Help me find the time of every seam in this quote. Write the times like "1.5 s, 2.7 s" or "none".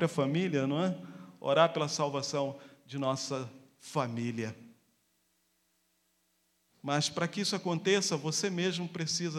none